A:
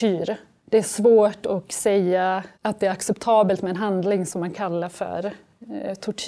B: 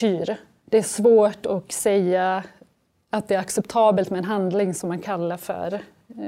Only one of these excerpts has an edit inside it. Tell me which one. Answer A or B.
A